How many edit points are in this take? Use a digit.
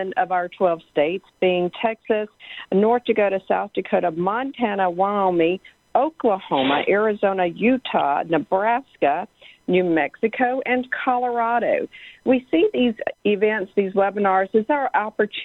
0